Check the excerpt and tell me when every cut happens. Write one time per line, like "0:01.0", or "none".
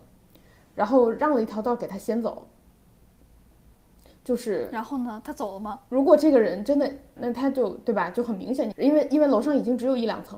0:07.2
0:08.7